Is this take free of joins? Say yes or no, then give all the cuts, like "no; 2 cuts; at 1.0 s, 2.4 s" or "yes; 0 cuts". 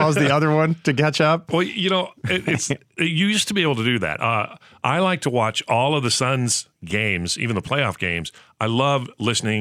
yes; 0 cuts